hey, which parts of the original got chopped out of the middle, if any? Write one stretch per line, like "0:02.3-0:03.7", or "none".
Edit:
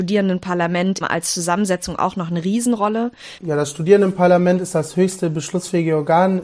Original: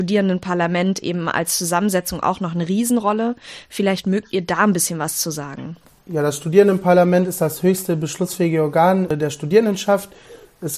0:01.0-0:01.2
0:03.6-0:06.0